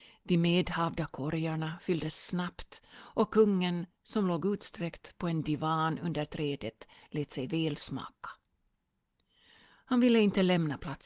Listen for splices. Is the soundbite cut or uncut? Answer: uncut